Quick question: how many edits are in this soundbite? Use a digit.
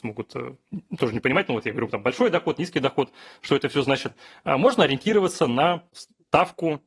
0